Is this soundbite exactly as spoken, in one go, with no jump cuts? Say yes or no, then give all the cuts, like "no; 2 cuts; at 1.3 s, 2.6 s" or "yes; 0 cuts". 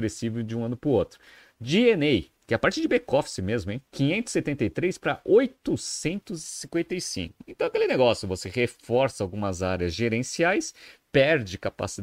no; 1 cut; at 3.9 s